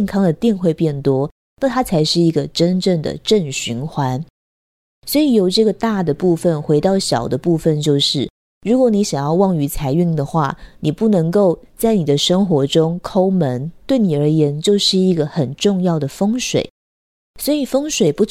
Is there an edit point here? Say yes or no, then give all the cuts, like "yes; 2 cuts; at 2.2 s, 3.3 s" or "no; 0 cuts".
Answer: no; 0 cuts